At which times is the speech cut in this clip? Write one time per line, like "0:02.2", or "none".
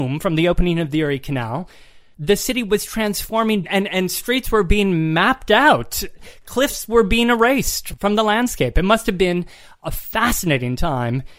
none